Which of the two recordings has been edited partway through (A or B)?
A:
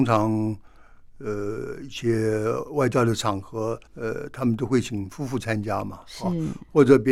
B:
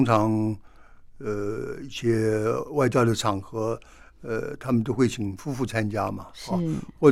A